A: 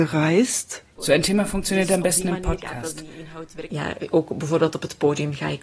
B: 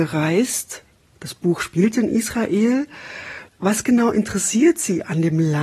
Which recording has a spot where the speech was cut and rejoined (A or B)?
A